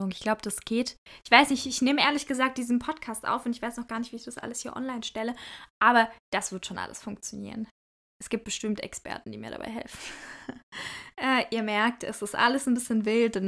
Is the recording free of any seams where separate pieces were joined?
yes; 0 cuts

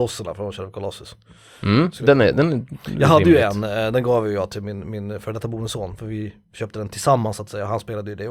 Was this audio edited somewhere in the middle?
no; 0 cuts

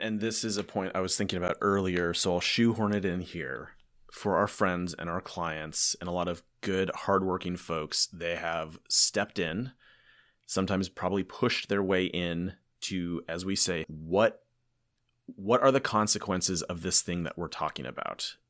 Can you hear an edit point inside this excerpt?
yes; 1 cut; at 13.8 s

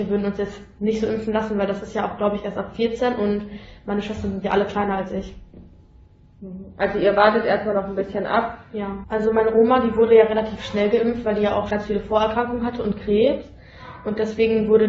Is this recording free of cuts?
no; 2 cuts; at 9.0 s, 11.7 s

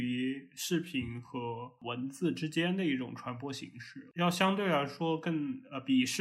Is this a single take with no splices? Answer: yes; 0 cuts

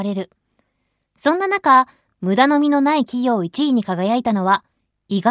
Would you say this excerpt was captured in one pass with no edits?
yes; 0 cuts

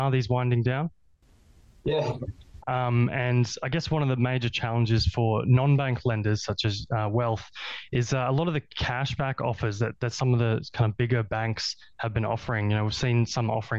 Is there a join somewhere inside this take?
yes; 1 cut; at 2.6 s

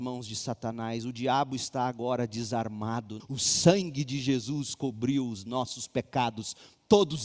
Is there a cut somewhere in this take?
yes; 1 cut; at 3.2 s

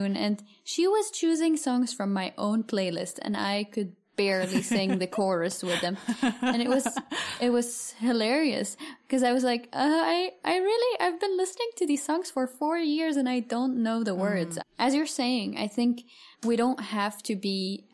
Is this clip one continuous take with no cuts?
no; 2 cuts; at 14.6 s, 16.3 s

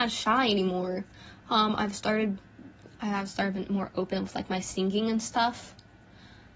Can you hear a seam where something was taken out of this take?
no; 0 cuts

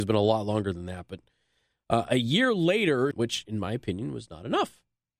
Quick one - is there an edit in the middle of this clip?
yes; 1 cut; at 3.1 s

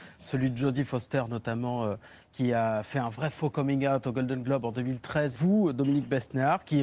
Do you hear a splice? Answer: yes; 1 cut; at 5.3 s

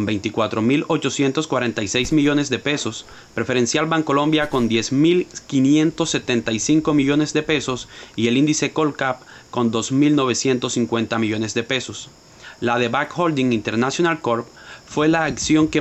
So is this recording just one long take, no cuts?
yes; 0 cuts

